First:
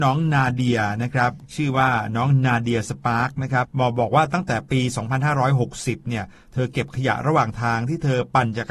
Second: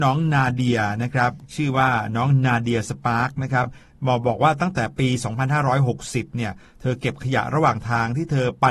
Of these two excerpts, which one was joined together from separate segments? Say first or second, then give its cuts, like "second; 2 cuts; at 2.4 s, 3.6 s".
first; 1 cut; at 3.6 s